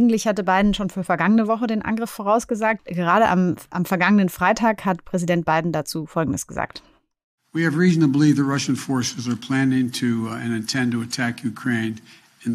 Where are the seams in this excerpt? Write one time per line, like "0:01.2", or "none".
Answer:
0:02.8